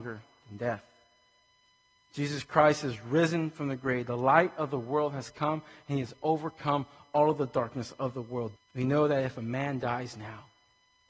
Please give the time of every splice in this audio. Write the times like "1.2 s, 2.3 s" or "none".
8.6 s